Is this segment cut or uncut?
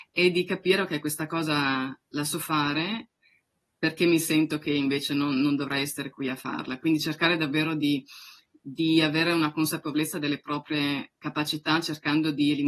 uncut